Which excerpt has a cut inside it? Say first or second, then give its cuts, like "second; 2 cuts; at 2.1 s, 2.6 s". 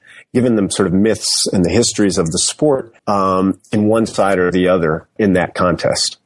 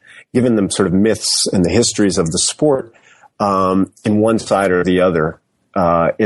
first; 2 cuts; at 3.0 s, 5.2 s